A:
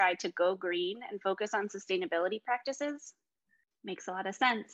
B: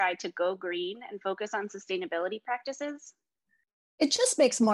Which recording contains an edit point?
A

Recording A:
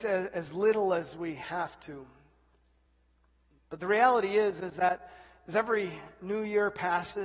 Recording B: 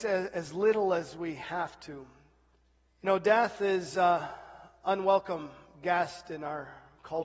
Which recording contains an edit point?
B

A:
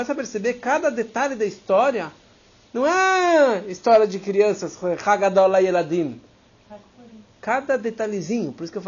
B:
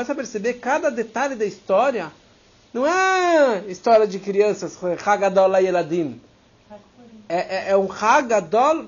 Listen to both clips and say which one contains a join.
A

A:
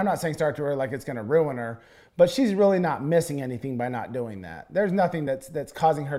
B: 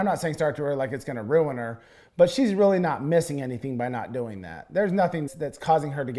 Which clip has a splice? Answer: B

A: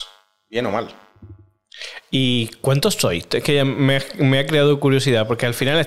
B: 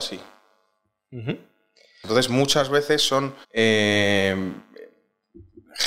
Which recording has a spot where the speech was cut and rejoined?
B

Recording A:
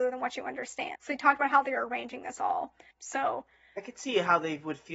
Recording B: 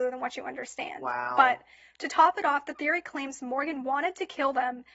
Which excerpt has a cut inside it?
A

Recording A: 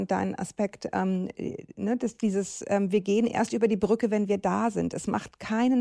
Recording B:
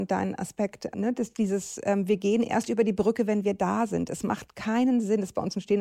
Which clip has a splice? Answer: B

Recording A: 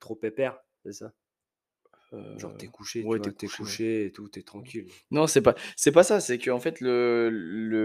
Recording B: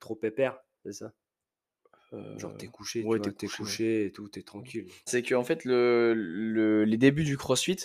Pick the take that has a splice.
B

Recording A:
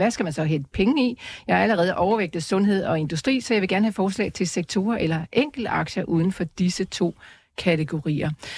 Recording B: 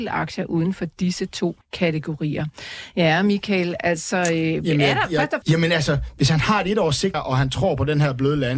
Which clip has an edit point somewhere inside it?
B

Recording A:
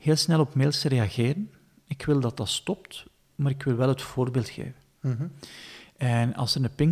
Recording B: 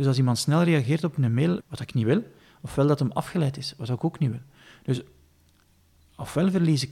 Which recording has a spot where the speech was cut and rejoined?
B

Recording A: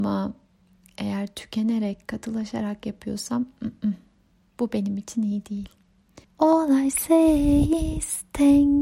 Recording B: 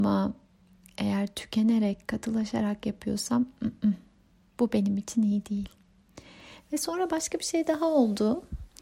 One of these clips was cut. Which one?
A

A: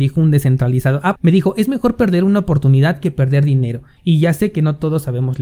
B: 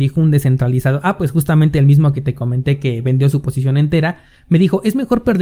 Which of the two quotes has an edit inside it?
A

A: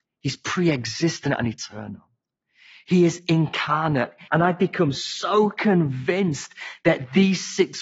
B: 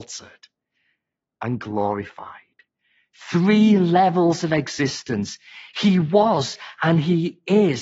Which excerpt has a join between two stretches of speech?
A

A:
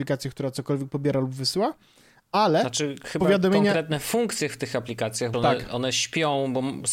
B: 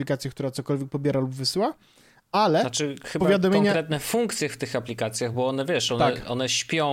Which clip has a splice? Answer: A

